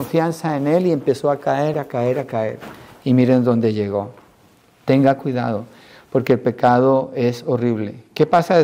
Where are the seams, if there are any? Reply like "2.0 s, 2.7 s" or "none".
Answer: 1.7 s